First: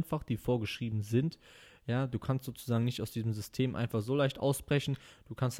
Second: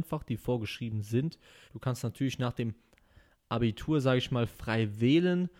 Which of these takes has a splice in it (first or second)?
second